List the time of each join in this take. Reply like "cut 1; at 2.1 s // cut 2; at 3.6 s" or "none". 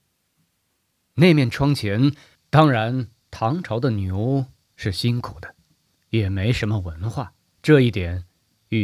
cut 1; at 2.3 s